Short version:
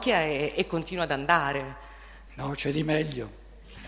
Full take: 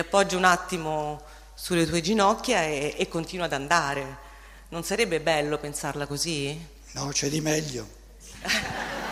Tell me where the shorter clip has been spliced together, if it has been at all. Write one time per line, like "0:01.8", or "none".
0:02.3